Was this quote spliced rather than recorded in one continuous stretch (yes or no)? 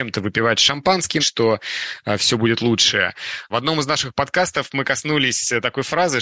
yes